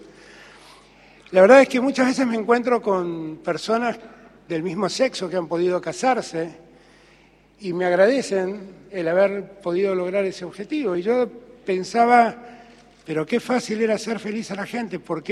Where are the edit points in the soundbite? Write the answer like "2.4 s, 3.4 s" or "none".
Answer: none